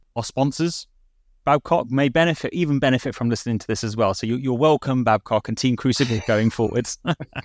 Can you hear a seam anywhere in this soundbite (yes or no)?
no